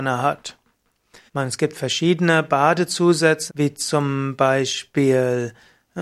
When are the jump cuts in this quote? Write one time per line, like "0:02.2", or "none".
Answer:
0:01.3
0:03.5